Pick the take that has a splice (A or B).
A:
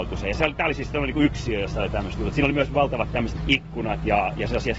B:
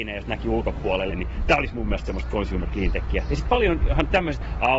B